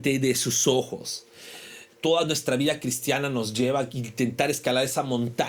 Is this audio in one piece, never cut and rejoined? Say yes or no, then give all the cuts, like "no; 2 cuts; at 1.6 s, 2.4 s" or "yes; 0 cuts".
no; 1 cut; at 1.9 s